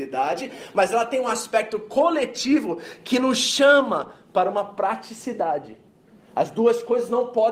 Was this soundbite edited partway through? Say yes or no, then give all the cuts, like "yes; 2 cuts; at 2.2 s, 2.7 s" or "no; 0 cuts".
no; 0 cuts